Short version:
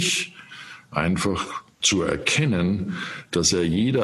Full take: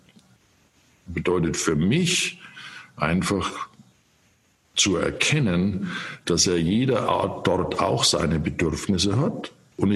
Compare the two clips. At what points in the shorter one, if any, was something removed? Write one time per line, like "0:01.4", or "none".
0:01.7